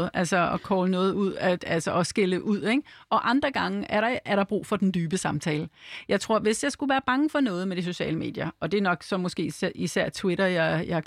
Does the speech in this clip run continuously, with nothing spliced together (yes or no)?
yes